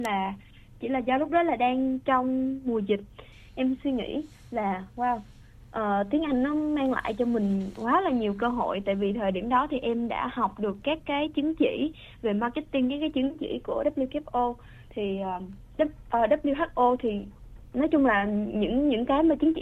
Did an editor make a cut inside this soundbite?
no; 0 cuts

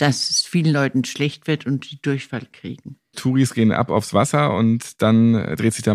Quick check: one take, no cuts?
no; 1 cut; at 3.1 s

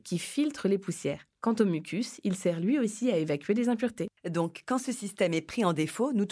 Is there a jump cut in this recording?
no; 0 cuts

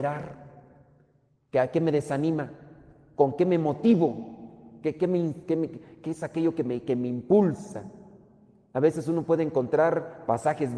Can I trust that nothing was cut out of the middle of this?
yes; 0 cuts

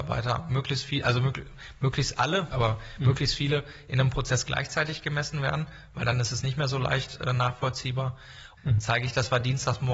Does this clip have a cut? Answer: yes; 2 cuts; at 2.5 s, 8.6 s

